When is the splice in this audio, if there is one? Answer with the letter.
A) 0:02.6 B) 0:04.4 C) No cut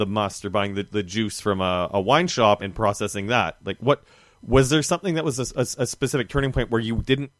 A